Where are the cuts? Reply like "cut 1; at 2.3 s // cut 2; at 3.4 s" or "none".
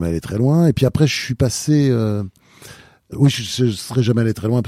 cut 1; at 3.1 s